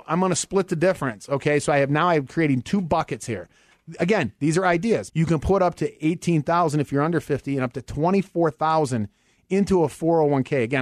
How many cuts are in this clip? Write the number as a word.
one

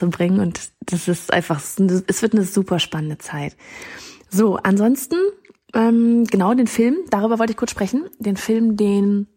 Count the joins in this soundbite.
zero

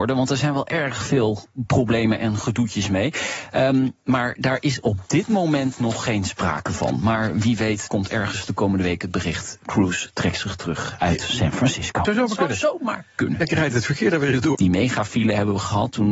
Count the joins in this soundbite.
three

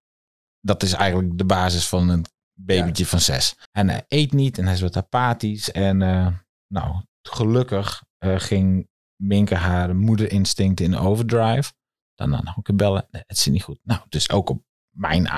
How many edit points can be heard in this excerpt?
one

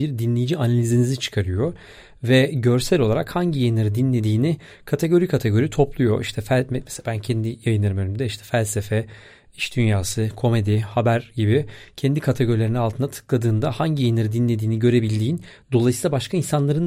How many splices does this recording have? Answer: zero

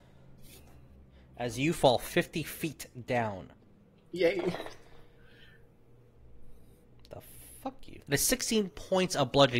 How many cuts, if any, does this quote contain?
one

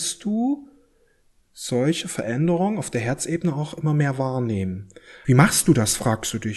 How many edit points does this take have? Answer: one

